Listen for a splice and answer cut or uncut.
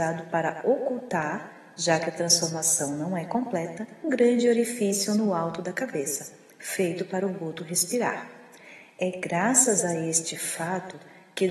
cut